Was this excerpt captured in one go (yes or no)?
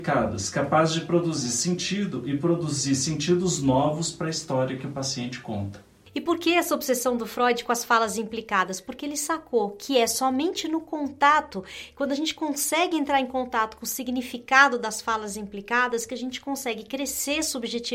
yes